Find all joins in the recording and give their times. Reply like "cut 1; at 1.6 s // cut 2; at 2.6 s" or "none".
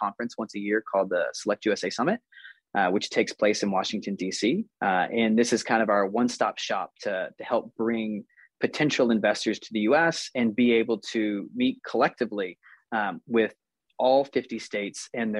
cut 1; at 4.7 s